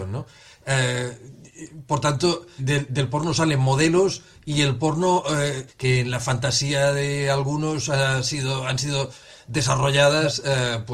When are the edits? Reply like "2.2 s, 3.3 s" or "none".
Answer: 2.6 s, 5.7 s

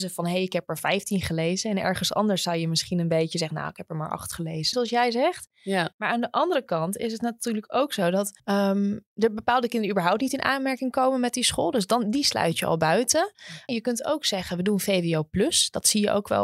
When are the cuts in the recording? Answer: 4.7 s, 8.4 s, 13.7 s

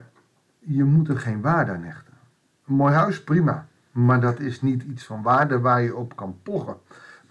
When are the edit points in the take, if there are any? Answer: none

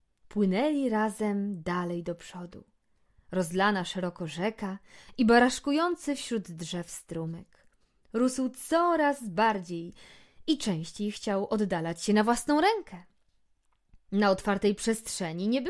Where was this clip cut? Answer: none

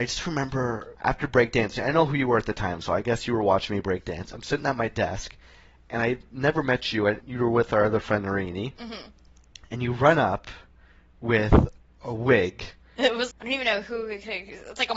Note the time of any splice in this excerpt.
0.9 s, 7.2 s, 13.3 s

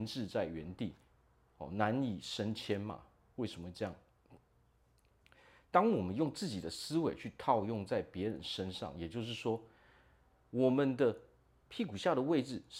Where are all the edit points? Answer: none

